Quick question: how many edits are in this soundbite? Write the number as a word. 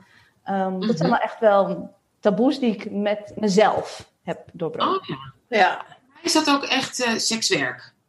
zero